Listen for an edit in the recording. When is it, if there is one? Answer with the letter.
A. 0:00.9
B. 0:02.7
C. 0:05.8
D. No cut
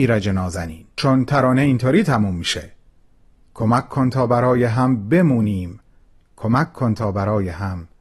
A